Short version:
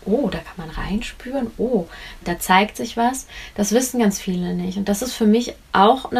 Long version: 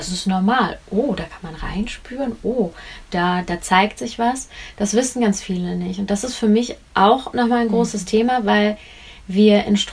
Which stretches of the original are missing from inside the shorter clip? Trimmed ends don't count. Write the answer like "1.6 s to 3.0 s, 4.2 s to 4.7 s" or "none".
3.1 s to 3.4 s